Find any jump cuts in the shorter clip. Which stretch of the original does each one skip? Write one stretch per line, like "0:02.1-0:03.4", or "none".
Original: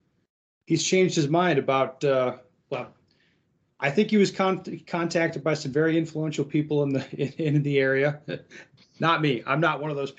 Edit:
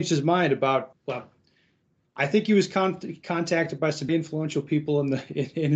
0:02.0-0:02.6
0:05.7-0:05.9

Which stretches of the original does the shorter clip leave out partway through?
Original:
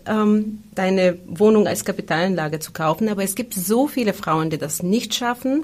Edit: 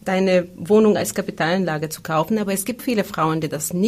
0:03.5-0:03.9

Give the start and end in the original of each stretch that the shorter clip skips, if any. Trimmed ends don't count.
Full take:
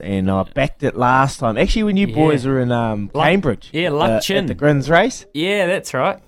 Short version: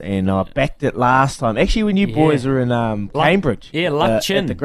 none

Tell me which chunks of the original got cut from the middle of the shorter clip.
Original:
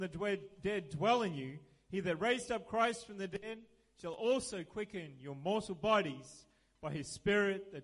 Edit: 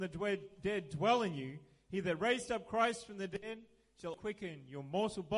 0:04.1-0:04.7

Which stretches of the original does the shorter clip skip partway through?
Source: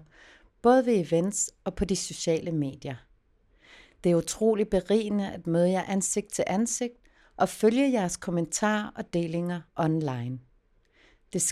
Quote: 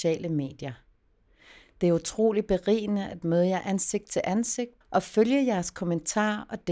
0:07.0-0:07.3

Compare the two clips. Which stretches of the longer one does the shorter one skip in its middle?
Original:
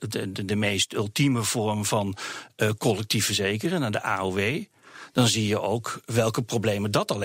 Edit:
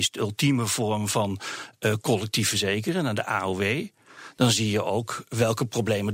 none

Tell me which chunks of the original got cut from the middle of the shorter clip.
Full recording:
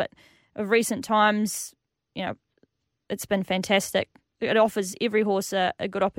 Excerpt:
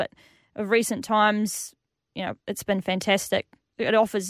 0:02.4-0:03.0

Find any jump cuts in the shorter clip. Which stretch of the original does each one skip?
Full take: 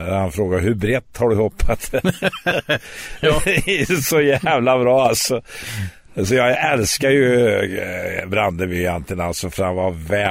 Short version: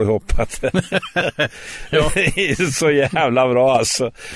none

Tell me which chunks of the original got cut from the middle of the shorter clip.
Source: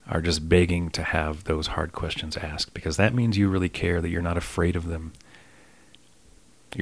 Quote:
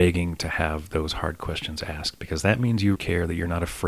0:03.5-0:03.7

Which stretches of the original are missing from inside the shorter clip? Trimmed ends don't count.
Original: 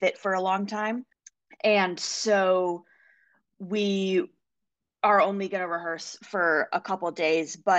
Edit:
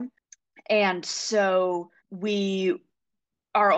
0:02.9-0:03.5

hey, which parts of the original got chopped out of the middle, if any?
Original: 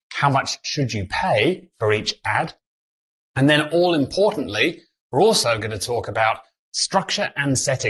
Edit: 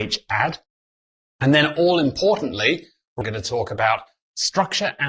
0:05.2-0:05.6

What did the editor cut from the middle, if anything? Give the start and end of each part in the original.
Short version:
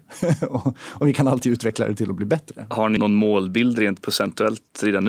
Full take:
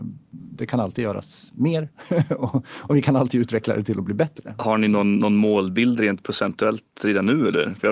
0:04.9-0:05.2

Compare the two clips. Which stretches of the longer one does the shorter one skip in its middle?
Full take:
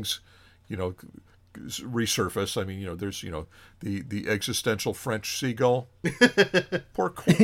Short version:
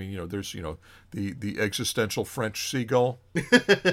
none

